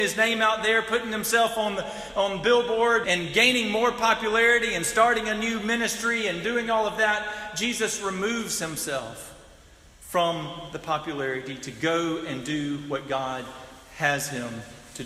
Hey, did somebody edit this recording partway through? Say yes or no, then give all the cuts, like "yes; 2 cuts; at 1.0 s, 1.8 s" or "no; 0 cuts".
yes; 1 cut; at 3.0 s